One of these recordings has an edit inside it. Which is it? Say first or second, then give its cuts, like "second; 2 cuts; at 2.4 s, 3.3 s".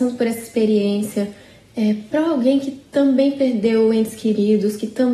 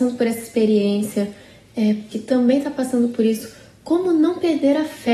second; 1 cut; at 2.1 s